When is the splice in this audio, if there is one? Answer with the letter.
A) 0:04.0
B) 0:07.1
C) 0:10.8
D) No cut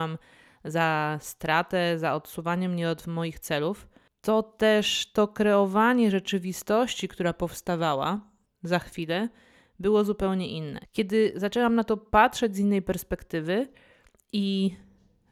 C